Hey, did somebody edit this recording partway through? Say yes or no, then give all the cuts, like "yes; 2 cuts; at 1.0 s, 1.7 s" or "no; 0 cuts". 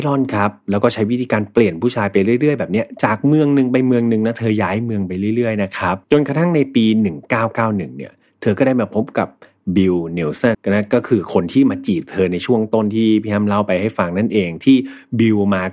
yes; 2 cuts; at 6.0 s, 10.5 s